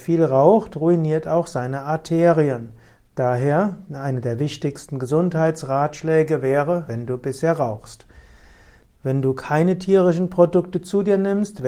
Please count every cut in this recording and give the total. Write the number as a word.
two